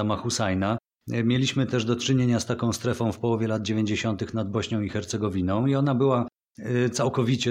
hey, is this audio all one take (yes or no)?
yes